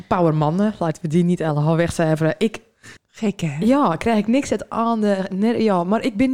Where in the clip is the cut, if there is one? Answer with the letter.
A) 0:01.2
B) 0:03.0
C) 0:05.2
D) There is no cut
B